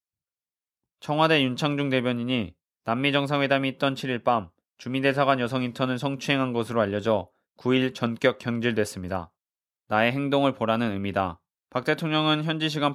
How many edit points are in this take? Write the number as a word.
two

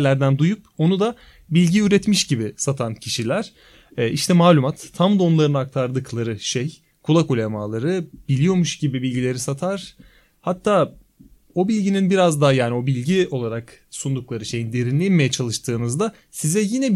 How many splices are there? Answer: zero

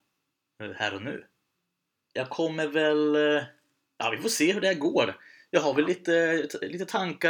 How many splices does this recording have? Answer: one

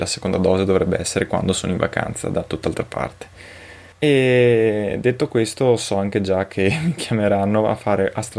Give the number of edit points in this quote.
one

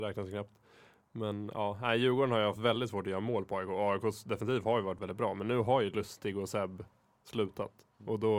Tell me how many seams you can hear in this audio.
one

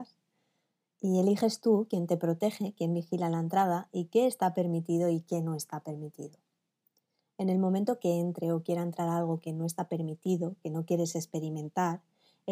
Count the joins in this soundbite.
zero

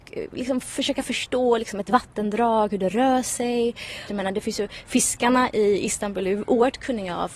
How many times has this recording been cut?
one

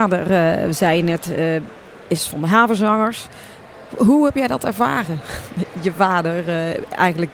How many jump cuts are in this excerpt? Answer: zero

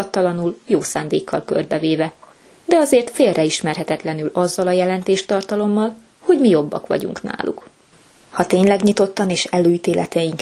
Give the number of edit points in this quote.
one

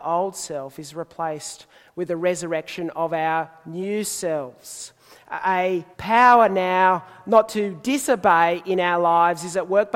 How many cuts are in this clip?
one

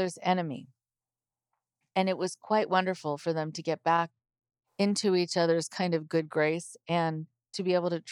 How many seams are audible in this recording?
zero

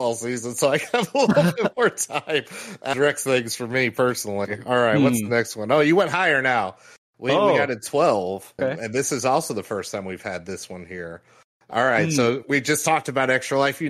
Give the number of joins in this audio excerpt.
two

